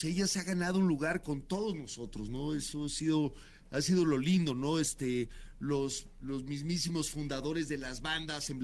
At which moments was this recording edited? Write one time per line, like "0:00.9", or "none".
none